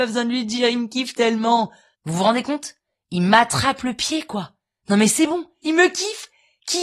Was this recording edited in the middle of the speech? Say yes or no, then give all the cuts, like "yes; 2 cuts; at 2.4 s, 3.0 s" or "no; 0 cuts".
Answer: yes; 2 cuts; at 1.9 s, 5.6 s